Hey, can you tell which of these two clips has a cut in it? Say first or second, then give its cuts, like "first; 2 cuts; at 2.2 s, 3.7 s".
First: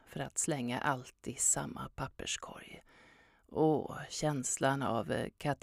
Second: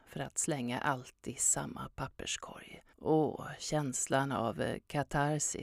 second; 1 cut; at 2.9 s